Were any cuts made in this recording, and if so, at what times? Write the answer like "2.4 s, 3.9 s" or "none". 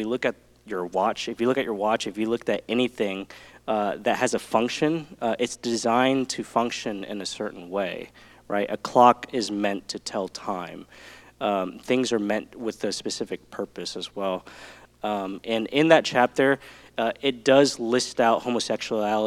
14.9 s